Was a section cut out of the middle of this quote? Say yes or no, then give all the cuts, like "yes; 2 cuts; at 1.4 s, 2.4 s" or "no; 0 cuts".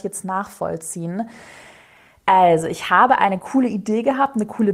no; 0 cuts